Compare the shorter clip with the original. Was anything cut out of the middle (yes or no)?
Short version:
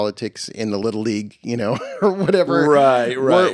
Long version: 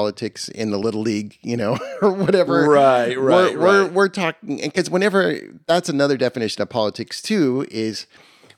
no